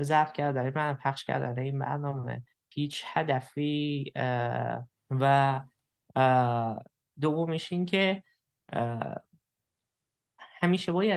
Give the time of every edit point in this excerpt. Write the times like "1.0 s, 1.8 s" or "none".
4.9 s